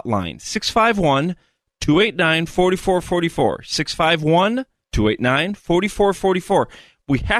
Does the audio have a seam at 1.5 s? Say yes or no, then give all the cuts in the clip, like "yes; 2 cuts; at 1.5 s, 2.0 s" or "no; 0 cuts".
no; 0 cuts